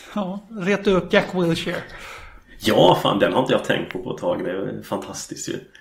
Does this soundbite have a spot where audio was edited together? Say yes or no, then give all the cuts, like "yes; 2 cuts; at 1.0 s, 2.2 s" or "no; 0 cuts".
yes; 1 cut; at 1.1 s